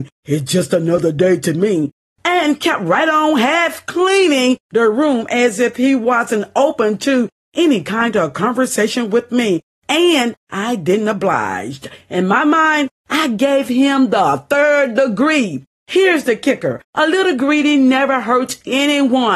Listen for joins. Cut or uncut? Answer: uncut